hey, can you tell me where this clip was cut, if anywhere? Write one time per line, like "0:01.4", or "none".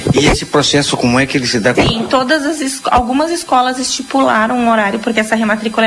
0:01.7